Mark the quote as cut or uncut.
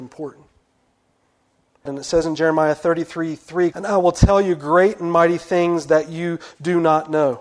cut